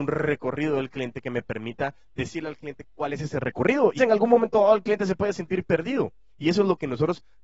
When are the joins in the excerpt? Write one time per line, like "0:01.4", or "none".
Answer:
0:04.0